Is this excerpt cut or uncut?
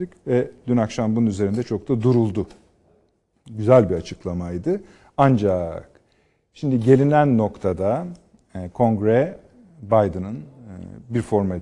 cut